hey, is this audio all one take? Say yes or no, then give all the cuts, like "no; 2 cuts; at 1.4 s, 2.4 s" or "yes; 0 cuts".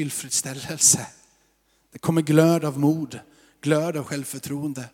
yes; 0 cuts